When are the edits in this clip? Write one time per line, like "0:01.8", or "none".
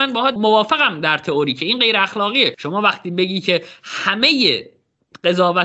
none